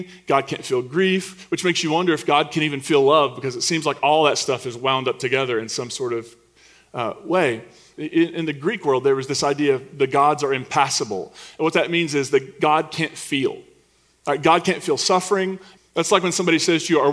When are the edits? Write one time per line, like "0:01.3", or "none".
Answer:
0:07.9
0:15.8